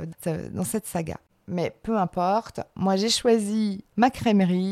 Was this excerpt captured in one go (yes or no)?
no